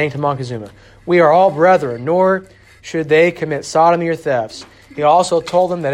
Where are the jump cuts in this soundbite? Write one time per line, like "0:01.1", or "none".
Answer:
none